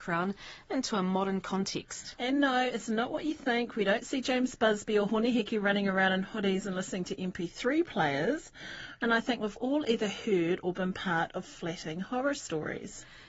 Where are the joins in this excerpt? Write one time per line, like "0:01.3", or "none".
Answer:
0:09.0